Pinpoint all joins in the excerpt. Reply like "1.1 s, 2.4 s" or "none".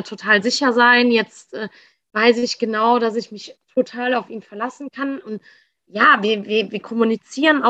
none